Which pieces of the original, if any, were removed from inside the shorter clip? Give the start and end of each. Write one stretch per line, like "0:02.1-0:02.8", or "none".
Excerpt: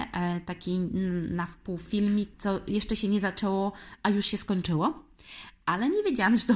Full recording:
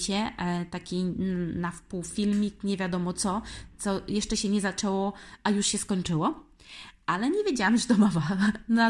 0:02.6-0:03.7